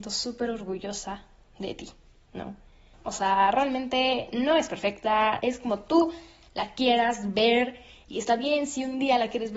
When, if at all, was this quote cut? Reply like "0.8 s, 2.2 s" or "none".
2.9 s, 5.4 s